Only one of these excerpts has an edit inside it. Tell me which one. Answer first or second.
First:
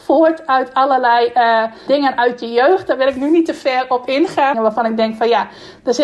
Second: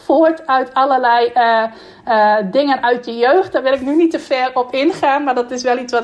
first